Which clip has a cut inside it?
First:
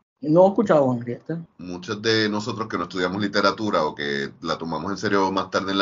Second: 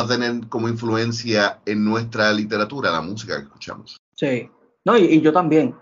first; 1 cut; at 1.5 s

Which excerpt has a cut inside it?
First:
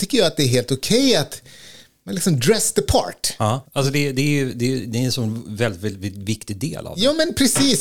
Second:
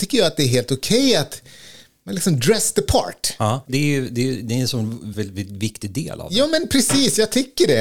second; 2 cuts; at 3.7 s, 5.1 s

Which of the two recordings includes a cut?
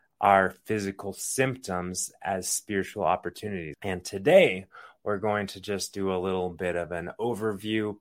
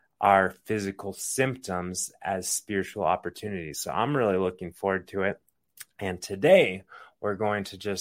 first; 1 cut; at 3.7 s

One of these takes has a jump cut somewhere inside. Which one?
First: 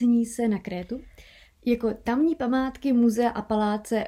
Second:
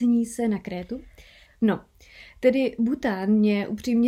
second; 1 cut; at 1.5 s

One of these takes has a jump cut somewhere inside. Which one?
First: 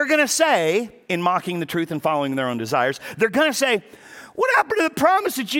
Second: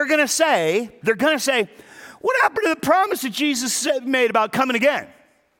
second; 1 cut; at 1.0 s

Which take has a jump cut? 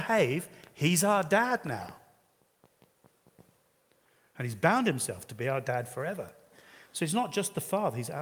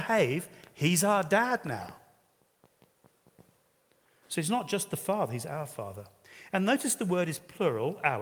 second; 1 cut; at 4.2 s

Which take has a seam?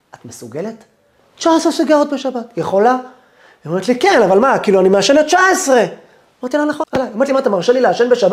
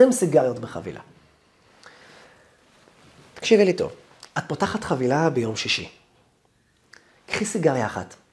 first; 1 cut; at 6.8 s

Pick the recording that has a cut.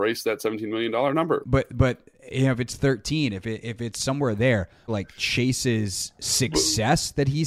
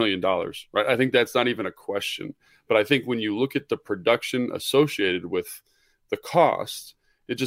first; 2 cuts; at 1.4 s, 4.9 s

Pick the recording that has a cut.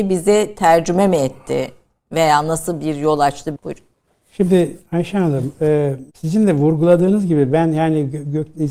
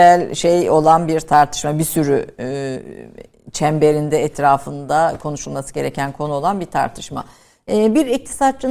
first; 2 cuts; at 3.6 s, 6.1 s

